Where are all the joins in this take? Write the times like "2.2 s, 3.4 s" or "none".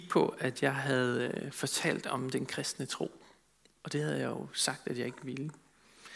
none